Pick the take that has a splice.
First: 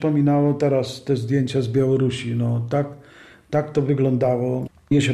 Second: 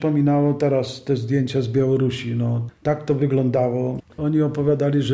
second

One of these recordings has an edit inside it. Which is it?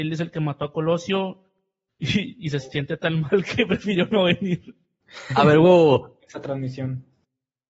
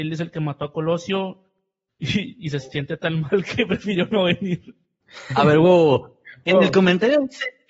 first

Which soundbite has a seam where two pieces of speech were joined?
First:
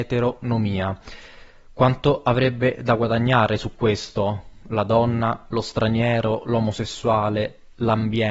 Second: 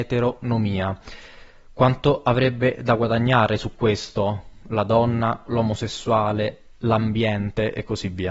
second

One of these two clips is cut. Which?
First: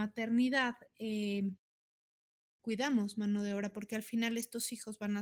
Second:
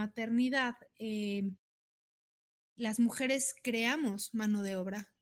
first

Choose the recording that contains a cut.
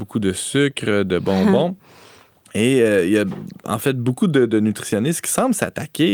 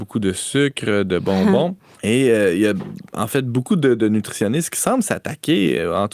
second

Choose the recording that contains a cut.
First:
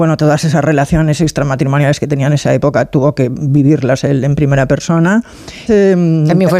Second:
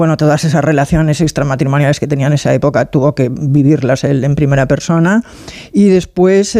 first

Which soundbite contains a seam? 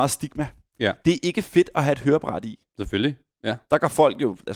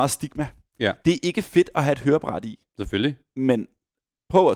first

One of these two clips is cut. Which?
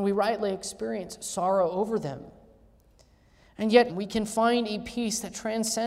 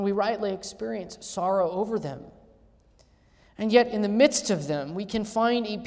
first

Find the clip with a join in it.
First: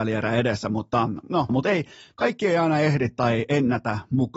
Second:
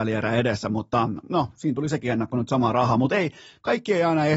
first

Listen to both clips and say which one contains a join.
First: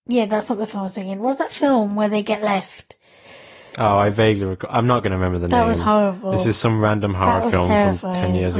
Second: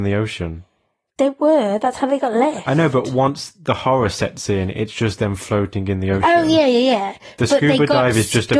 second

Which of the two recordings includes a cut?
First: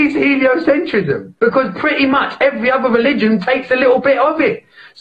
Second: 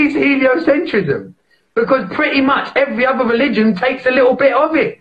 first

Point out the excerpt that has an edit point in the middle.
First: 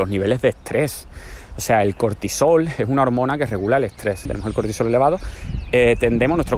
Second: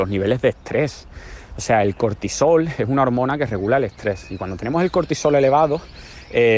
first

